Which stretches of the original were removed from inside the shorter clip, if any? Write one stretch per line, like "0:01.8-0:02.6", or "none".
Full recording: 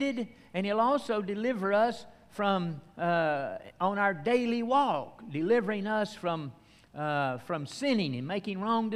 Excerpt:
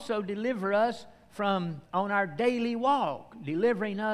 0:02.8-0:03.7